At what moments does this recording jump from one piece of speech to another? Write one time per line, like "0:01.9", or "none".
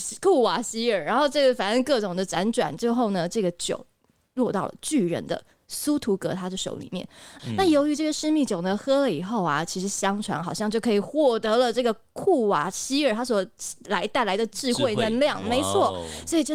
0:07.4

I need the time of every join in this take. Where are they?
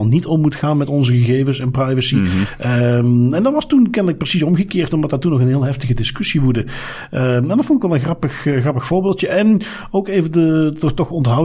none

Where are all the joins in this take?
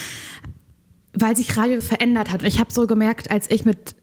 0:01.8

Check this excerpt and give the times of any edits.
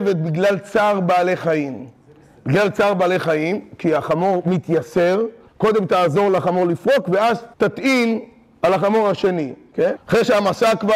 0:05.5
0:07.5
0:10.0

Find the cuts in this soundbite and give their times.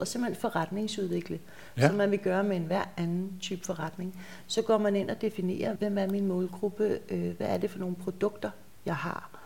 0:05.8

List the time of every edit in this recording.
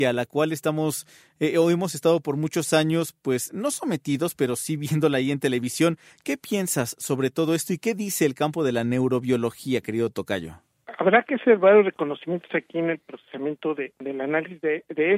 none

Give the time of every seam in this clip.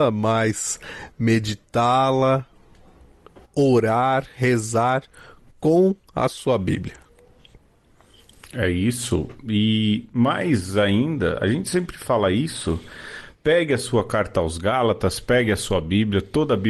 none

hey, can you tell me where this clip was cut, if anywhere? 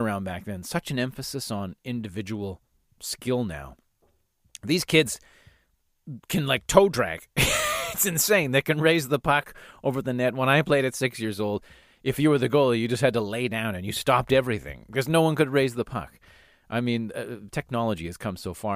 none

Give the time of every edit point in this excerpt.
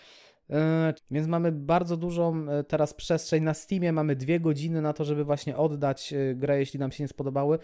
0:01.0

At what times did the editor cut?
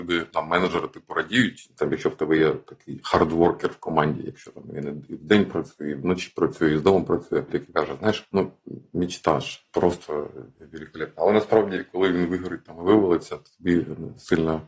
0:07.5

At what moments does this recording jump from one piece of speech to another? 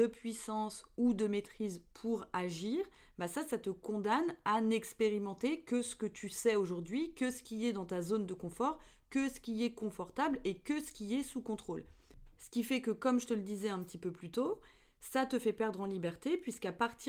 none

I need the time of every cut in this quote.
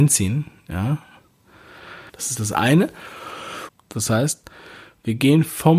0:02.1
0:03.7

